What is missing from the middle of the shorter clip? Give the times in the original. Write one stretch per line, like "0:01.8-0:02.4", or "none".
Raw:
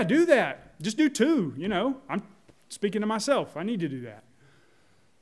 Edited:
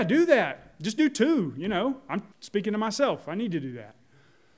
0:02.3-0:02.6